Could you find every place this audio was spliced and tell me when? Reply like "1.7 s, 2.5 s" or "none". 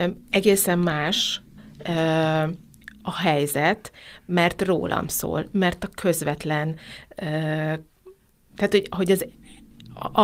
none